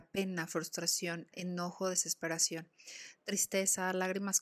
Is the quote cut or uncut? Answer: cut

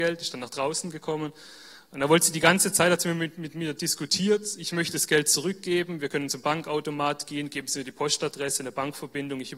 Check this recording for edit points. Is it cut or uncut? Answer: uncut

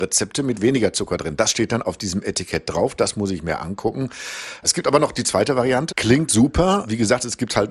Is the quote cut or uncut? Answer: cut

